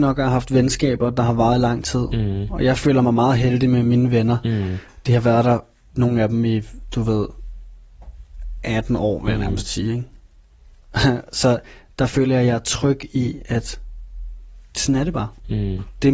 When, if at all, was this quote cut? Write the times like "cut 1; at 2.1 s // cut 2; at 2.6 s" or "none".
none